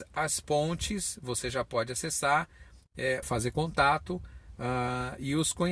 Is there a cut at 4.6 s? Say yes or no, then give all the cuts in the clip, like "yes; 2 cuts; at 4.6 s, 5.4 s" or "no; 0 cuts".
no; 1 cut; at 3.2 s